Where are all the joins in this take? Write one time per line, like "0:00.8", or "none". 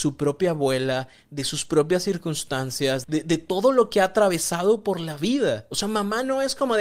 0:03.0

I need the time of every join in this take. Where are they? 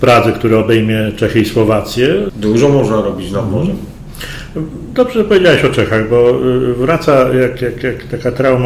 0:02.3

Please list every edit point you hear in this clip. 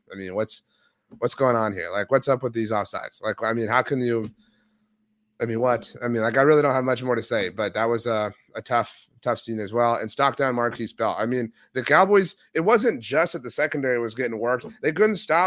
none

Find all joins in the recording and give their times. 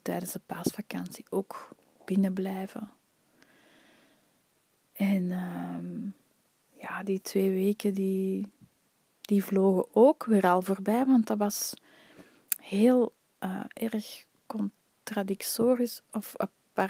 none

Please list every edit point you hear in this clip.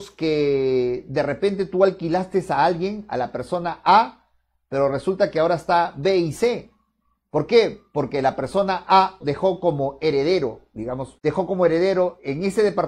0:09.2
0:11.2

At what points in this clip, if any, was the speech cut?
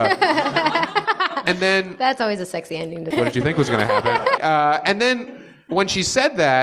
0:03.1
0:04.4

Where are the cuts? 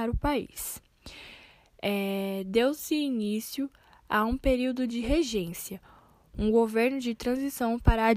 none

